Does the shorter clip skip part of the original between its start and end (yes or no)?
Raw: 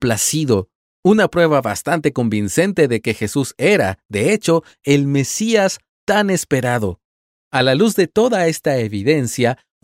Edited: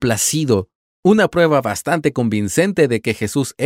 no